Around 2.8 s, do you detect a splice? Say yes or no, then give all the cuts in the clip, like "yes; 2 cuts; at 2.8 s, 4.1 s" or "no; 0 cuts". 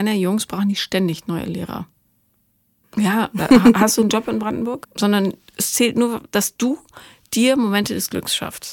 yes; 2 cuts; at 2.8 s, 4.8 s